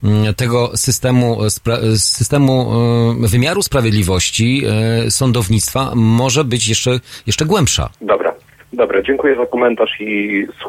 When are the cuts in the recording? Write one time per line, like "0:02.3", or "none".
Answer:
0:07.9